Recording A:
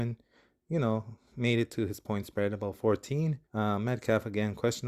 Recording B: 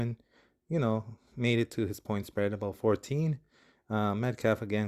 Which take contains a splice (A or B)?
A